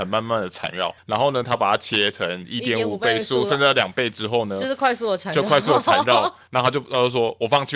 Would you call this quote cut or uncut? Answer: uncut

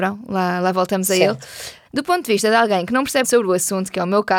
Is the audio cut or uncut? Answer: cut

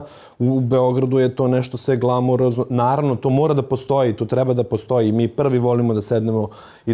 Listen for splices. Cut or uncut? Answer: uncut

